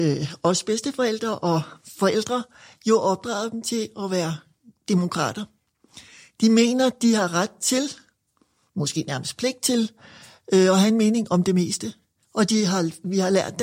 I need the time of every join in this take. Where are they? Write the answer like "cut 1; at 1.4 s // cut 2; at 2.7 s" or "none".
none